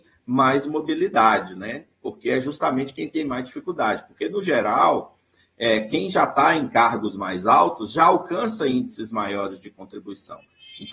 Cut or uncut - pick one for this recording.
uncut